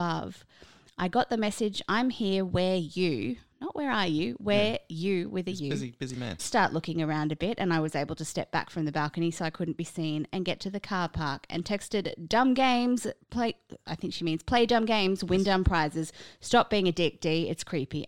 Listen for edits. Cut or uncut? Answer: cut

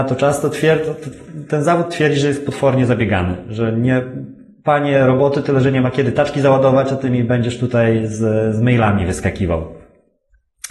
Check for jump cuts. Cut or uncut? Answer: uncut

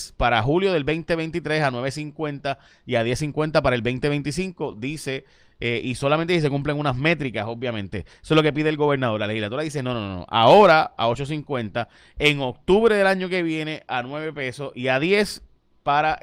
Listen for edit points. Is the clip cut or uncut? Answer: uncut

